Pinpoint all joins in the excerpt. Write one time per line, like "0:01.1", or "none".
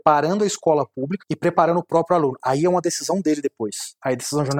0:01.2

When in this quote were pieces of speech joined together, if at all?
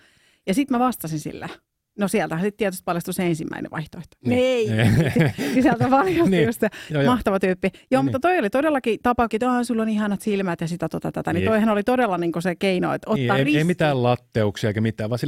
0:09.3

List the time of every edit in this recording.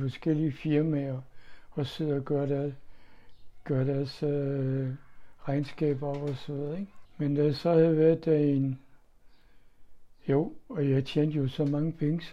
0:07.0

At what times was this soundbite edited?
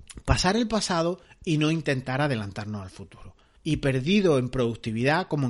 0:03.6

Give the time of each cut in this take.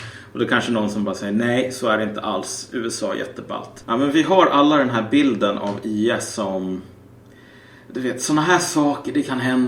0:03.8

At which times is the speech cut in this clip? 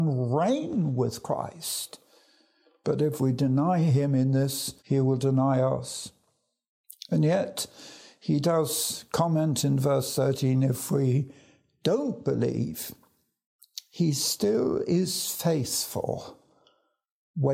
0:04.8

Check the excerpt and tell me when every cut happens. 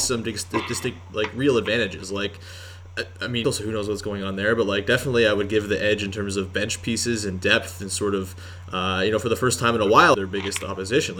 0:03.4
0:10.1

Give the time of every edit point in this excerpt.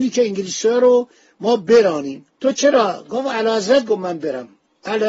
0:02.3

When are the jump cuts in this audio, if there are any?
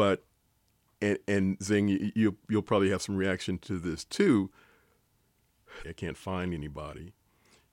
0:05.8

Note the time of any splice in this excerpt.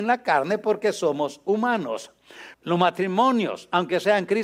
0:02.5

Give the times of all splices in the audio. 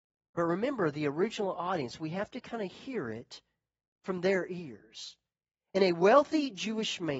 none

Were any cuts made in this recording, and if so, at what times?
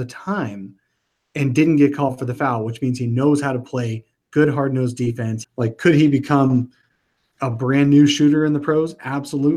0:05.4

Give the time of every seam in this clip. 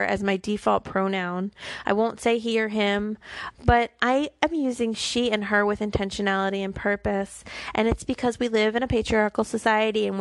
0:03.5

